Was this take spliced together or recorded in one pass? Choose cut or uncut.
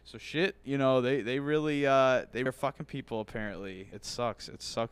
cut